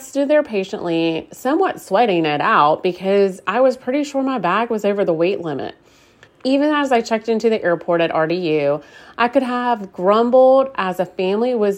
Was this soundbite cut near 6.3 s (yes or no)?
yes